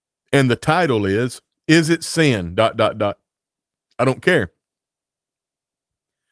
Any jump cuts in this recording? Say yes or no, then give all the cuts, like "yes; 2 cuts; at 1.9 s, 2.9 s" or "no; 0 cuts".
no; 0 cuts